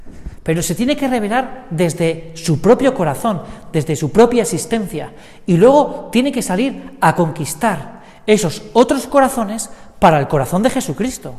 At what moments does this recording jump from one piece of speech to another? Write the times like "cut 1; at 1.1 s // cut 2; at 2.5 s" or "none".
none